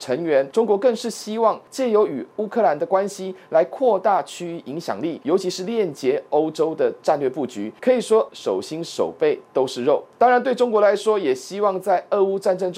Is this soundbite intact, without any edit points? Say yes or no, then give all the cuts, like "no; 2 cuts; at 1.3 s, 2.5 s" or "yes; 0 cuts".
no; 1 cut; at 8.3 s